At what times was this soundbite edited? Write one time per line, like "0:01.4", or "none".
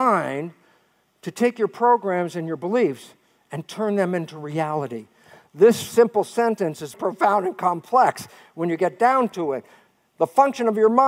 0:06.9